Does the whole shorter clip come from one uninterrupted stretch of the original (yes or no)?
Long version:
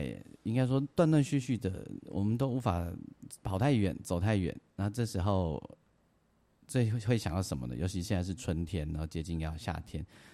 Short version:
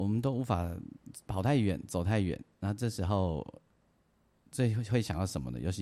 yes